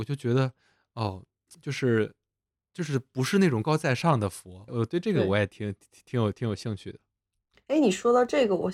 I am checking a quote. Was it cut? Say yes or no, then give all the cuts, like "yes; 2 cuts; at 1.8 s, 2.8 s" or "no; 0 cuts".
yes; 2 cuts; at 3.6 s, 4.7 s